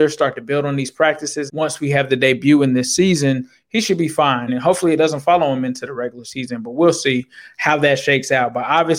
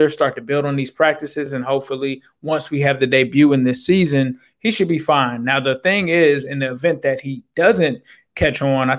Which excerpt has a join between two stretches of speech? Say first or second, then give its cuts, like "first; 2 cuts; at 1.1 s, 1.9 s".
first; 2 cuts; at 1.5 s, 4.5 s